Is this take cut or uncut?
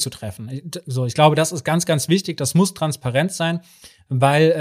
uncut